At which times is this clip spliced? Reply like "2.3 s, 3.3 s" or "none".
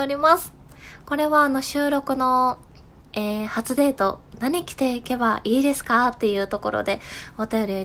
1.0 s

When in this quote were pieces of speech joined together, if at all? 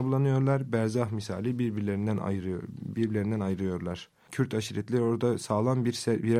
4.3 s

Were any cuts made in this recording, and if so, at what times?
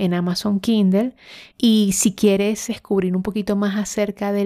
1.5 s, 2.7 s

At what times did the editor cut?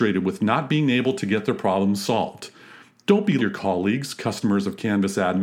3.4 s

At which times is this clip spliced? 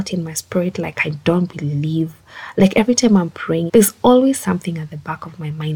3.7 s

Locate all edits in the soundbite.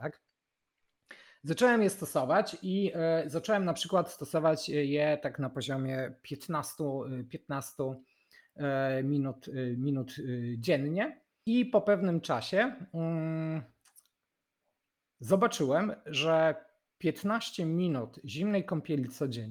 none

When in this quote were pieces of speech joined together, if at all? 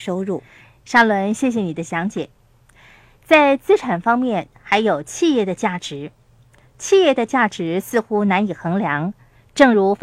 none

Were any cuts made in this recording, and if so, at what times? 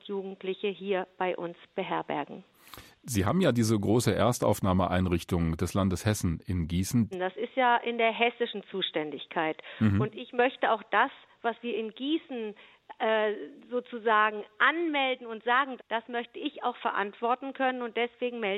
7.1 s, 15.8 s

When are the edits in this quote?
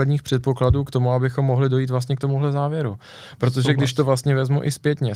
none

